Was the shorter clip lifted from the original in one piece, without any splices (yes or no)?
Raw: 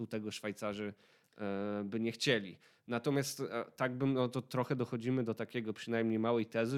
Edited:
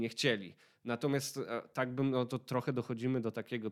yes